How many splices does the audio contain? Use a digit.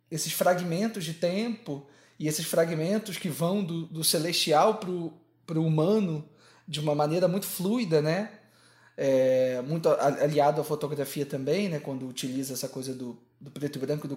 0